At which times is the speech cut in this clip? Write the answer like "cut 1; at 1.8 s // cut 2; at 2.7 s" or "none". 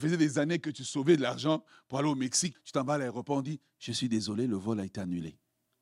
cut 1; at 2.5 s